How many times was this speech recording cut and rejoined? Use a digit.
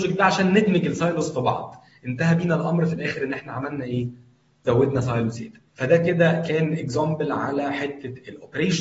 1